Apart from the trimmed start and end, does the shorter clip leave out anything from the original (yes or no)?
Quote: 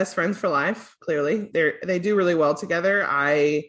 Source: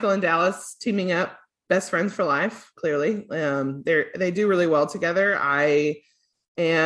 yes